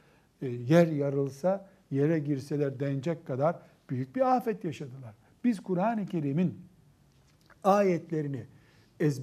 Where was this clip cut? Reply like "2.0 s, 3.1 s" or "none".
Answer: none